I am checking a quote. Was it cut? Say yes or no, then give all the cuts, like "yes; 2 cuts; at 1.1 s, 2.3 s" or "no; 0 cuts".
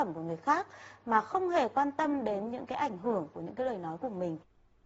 no; 0 cuts